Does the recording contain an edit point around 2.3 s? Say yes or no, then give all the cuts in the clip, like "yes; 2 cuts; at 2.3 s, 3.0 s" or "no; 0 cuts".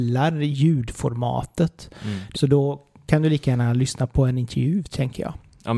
yes; 1 cut; at 2.3 s